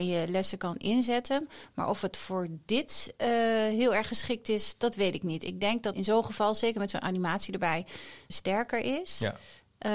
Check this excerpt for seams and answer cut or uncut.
cut